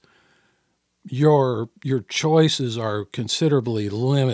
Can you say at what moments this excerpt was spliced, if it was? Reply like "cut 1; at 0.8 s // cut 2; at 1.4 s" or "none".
none